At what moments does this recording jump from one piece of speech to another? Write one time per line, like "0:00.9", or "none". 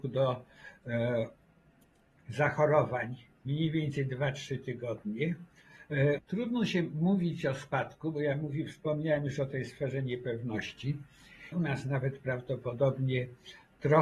0:06.2
0:11.5